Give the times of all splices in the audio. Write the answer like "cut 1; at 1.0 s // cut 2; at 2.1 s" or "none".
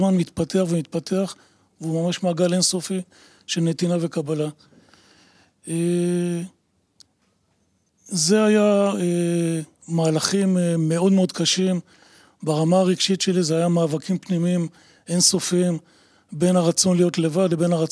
none